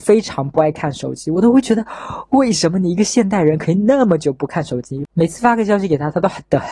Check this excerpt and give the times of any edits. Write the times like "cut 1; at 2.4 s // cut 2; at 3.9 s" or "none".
none